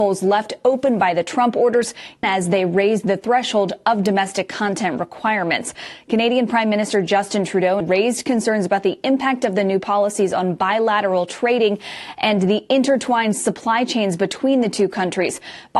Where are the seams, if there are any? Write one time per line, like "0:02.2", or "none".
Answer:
0:02.2
0:07.8